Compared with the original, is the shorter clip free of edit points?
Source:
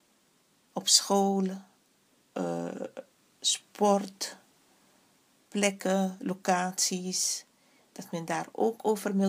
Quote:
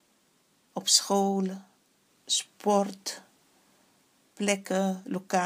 no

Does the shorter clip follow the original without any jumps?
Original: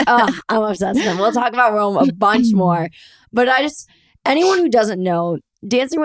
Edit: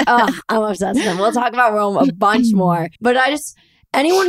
no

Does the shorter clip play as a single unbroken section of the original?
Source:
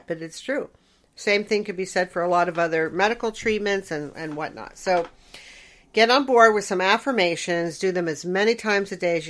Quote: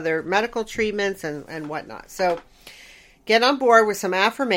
yes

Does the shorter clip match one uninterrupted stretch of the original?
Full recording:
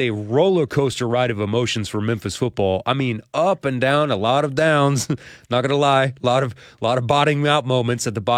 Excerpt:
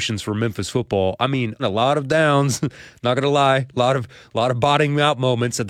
no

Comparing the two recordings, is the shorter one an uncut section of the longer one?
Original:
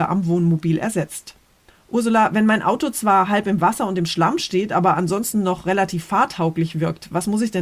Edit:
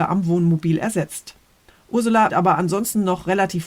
no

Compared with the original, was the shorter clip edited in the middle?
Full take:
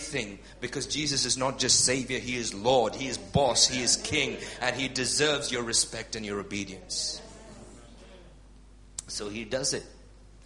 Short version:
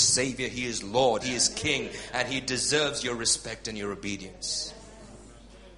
yes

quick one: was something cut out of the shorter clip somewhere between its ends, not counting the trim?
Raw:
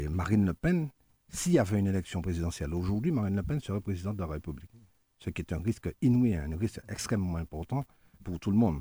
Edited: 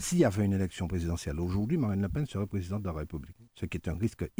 yes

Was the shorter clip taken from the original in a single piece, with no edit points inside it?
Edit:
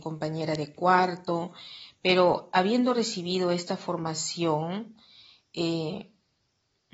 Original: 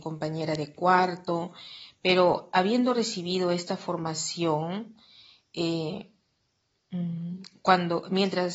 yes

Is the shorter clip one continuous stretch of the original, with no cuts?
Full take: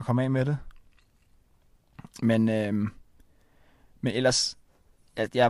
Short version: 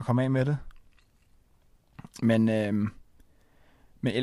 yes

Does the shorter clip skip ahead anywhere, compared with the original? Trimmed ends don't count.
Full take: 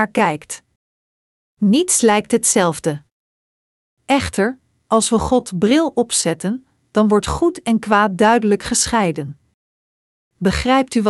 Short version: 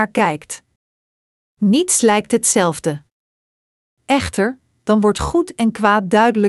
yes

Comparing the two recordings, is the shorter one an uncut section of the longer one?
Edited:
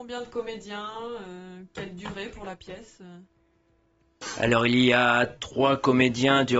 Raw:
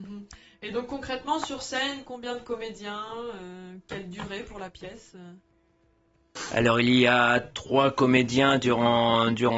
yes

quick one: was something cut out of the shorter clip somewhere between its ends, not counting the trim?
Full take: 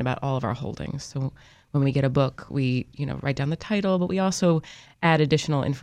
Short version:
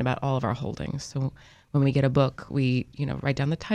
no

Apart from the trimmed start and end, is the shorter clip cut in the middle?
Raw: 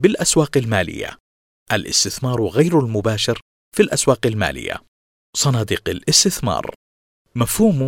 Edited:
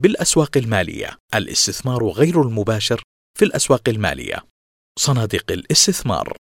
yes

